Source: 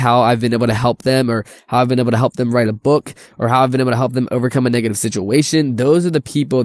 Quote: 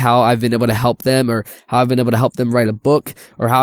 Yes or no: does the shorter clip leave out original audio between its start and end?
no